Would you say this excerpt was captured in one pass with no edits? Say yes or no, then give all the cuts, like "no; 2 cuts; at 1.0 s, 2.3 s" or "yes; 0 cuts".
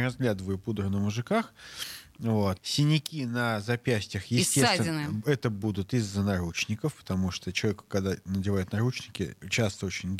no; 1 cut; at 2.6 s